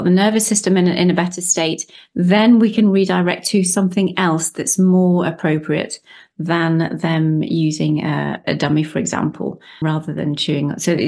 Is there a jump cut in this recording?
yes; 2 cuts; at 8.4 s, 9.8 s

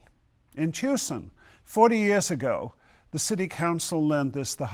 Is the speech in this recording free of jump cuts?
yes; 0 cuts

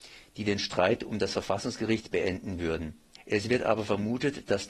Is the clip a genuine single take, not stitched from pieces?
no; 1 cut; at 3.2 s

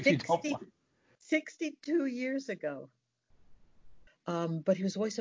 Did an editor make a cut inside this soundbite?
yes; 1 cut; at 4.1 s

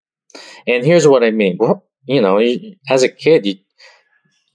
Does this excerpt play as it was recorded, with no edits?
no; 1 cut; at 1.6 s

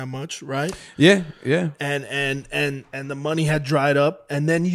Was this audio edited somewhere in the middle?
no; 0 cuts

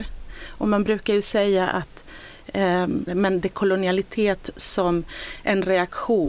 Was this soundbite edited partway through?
yes; 1 cut; at 3.1 s

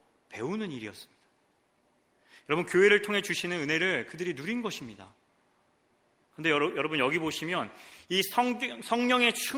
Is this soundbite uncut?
yes; 0 cuts

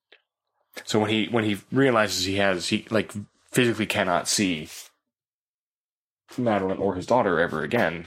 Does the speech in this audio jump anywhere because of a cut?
no; 0 cuts

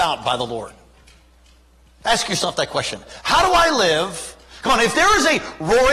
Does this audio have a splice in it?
no; 0 cuts

